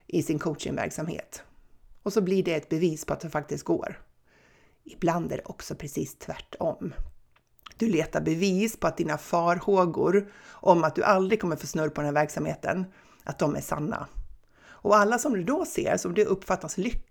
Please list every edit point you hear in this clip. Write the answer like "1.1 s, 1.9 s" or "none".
none